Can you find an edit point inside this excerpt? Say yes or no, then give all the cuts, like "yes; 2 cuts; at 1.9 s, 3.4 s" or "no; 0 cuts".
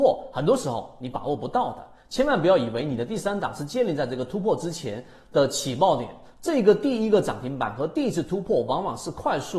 no; 0 cuts